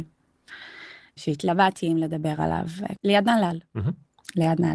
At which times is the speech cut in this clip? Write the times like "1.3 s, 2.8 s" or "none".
1.2 s, 3.0 s